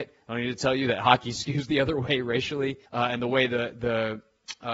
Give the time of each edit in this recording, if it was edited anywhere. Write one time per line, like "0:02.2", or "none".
0:02.9